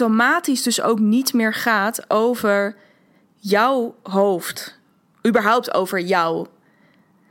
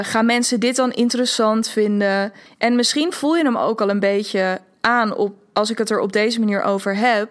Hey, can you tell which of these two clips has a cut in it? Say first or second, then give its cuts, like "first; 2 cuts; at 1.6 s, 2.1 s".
second; 1 cut; at 2.5 s